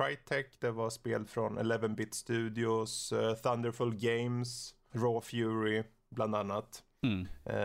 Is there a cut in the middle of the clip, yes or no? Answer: yes